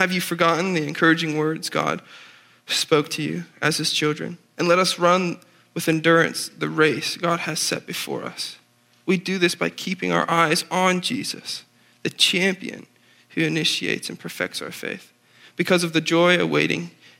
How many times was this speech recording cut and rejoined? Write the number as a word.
one